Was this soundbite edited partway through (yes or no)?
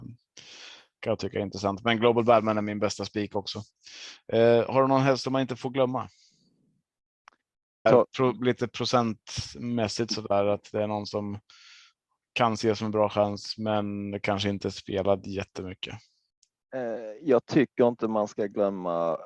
yes